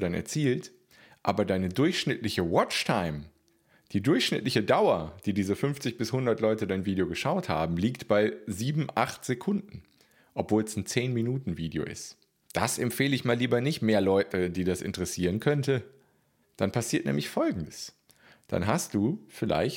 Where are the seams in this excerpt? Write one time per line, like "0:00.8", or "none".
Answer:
0:12.4
0:16.4